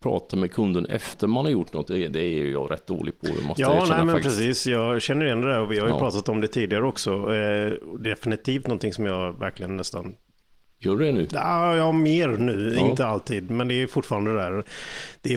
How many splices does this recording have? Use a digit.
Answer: 0